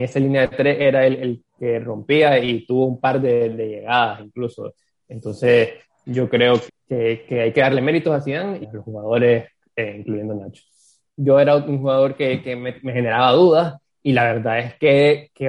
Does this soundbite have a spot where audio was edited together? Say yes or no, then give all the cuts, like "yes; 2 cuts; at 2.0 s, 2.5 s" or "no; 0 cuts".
yes; 3 cuts; at 6.7 s, 8.6 s, 11.1 s